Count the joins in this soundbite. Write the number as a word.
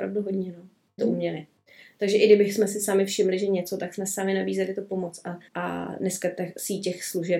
two